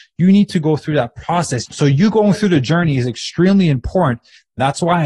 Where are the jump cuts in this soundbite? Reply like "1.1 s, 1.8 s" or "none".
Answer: 1.7 s